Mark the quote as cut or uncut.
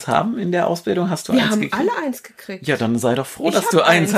uncut